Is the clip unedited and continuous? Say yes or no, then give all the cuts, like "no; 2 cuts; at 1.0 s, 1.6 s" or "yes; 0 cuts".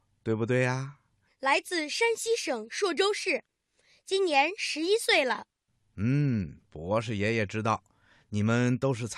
no; 1 cut; at 1.3 s